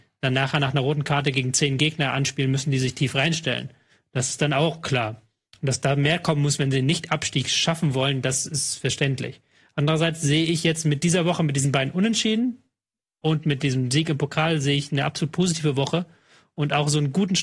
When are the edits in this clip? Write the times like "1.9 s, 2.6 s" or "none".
none